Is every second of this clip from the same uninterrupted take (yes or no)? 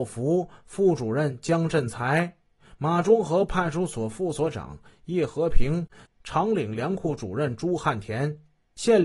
no